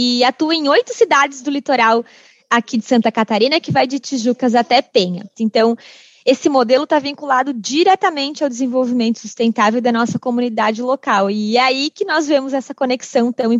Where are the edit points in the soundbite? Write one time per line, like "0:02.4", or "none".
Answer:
0:05.3